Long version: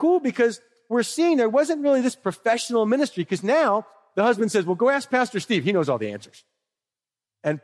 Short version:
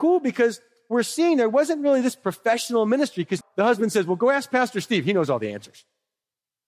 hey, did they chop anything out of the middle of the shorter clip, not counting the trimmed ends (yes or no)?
yes